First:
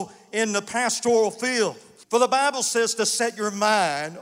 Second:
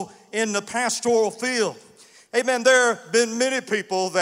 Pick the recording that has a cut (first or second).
first